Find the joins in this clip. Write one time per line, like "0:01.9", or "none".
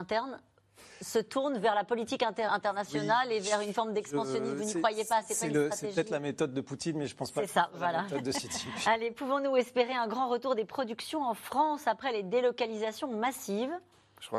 0:02.5